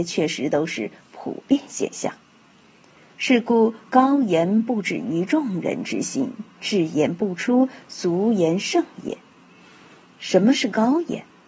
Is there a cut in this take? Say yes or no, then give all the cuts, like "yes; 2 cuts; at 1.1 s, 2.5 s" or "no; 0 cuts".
no; 0 cuts